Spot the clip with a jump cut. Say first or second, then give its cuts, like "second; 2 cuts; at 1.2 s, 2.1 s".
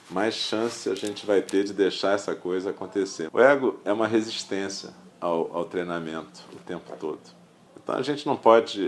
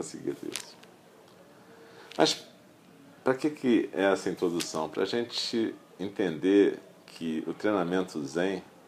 first; 3 cuts; at 3.3 s, 5.1 s, 7.7 s